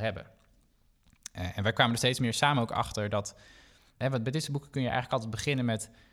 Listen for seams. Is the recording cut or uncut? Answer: uncut